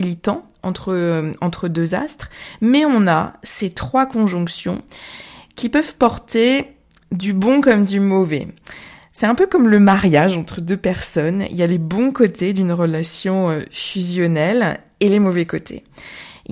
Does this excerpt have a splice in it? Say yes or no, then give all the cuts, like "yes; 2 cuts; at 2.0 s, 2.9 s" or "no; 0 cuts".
no; 0 cuts